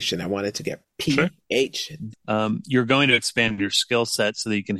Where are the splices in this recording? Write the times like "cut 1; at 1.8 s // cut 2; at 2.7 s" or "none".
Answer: cut 1; at 2.1 s